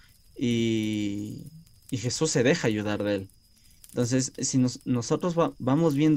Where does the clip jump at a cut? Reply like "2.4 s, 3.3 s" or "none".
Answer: 3.8 s